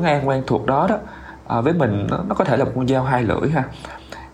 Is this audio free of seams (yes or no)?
yes